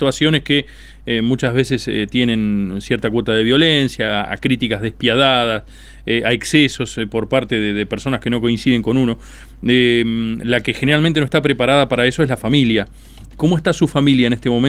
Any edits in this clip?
no; 0 cuts

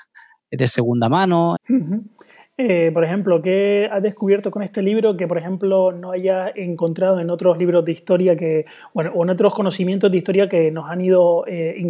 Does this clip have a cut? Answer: yes; 1 cut; at 1.6 s

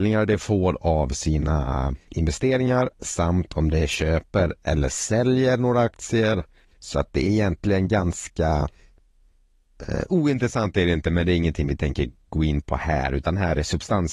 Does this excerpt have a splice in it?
no; 0 cuts

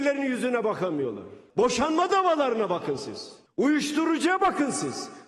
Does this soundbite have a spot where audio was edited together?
no; 0 cuts

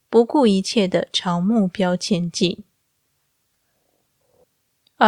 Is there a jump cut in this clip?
no; 0 cuts

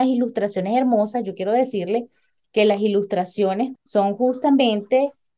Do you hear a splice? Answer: yes; 1 cut; at 3.8 s

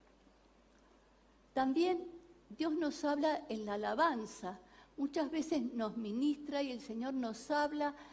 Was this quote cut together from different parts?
yes; 1 cut; at 1.3 s

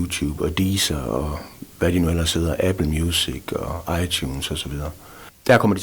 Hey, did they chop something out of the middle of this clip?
no; 0 cuts

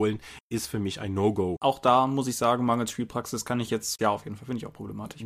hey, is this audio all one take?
no; 2 cuts; at 1.6 s, 4.0 s

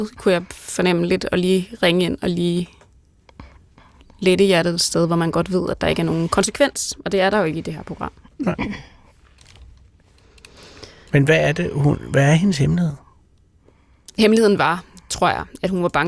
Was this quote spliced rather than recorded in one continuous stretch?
no; 0 cuts

